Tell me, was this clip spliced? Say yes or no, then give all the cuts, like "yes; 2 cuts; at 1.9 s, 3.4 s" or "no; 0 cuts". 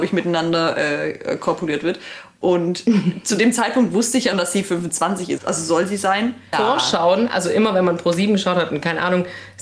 yes; 3 cuts; at 4.3 s, 5.4 s, 6.5 s